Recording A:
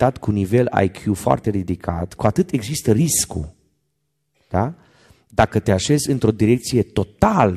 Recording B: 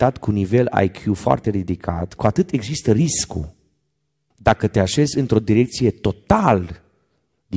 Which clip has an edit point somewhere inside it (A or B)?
B